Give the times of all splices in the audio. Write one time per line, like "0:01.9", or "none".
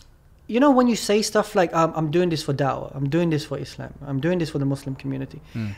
none